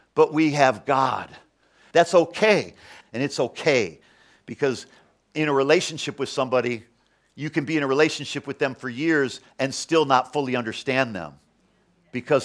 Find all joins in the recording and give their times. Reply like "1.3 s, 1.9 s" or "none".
1.9 s, 3.0 s